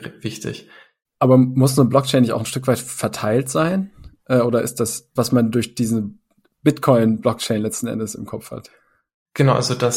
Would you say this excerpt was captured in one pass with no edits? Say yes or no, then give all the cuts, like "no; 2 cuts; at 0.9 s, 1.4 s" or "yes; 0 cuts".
no; 2 cuts; at 1.0 s, 5.2 s